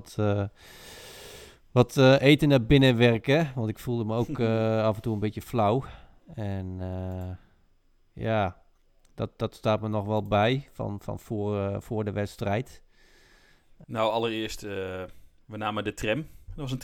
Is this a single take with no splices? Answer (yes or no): no